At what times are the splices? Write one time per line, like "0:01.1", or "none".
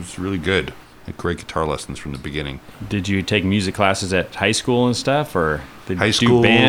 none